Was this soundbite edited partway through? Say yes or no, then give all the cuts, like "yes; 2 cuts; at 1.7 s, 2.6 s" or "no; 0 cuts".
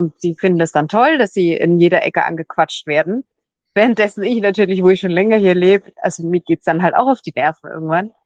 no; 0 cuts